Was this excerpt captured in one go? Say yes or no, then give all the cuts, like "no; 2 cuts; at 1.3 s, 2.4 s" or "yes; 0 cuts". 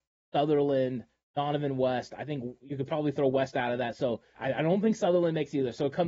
no; 1 cut; at 4.4 s